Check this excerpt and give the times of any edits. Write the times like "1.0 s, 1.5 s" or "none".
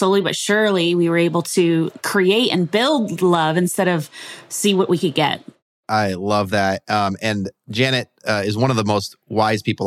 2.0 s